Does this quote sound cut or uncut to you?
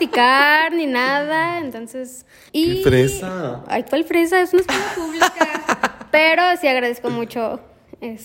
cut